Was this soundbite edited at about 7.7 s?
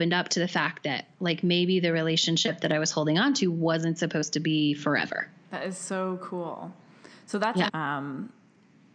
yes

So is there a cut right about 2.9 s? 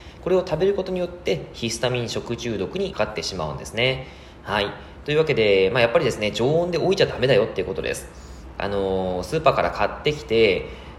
yes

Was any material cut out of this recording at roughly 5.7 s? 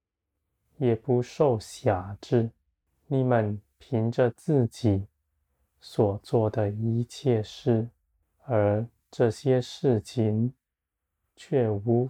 no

